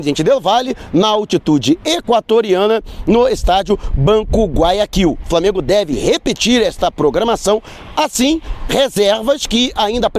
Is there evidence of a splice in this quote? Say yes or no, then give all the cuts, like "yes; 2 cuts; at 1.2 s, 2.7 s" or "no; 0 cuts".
no; 0 cuts